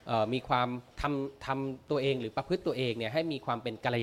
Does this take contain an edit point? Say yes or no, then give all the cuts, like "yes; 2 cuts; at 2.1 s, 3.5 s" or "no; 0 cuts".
no; 0 cuts